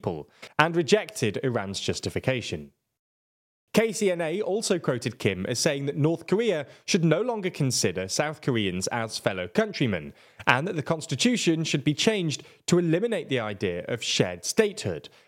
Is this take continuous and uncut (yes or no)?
no